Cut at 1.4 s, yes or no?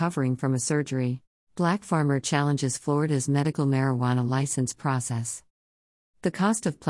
yes